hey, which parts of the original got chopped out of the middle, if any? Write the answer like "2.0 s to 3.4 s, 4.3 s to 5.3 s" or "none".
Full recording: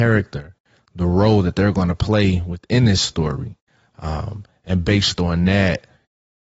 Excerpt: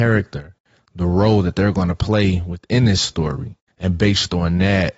3.7 s to 4.6 s